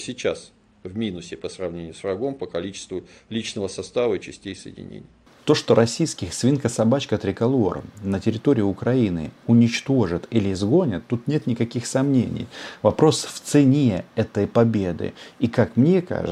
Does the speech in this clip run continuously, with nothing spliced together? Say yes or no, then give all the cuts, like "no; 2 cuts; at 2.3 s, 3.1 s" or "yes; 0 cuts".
yes; 0 cuts